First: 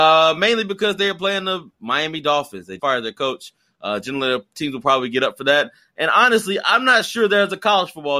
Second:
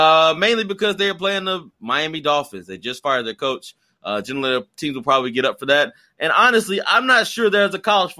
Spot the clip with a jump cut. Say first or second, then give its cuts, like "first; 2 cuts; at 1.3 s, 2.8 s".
first; 1 cut; at 2.8 s